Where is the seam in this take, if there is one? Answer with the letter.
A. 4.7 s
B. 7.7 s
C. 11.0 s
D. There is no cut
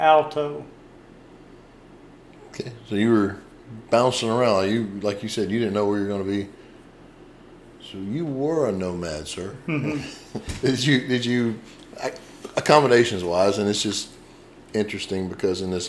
D